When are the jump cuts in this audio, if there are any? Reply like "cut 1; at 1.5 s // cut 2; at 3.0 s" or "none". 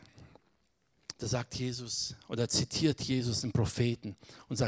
cut 1; at 1.1 s